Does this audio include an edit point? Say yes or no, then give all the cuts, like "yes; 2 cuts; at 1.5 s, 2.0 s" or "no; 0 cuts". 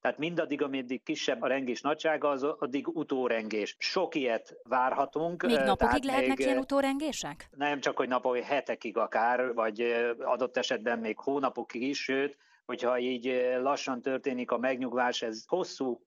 yes; 1 cut; at 1.4 s